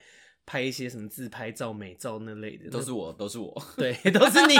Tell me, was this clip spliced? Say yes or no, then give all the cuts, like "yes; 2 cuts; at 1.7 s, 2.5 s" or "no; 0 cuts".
no; 0 cuts